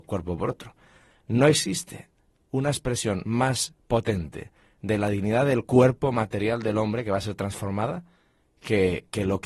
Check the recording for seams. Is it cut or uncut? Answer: cut